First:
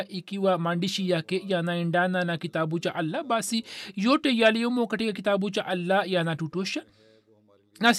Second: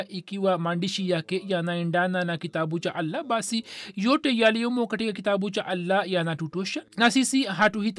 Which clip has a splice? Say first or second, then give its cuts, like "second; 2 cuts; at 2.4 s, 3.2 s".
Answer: second; 1 cut; at 6.9 s